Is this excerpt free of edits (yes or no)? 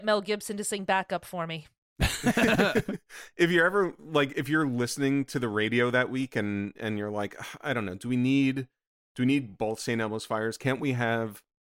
yes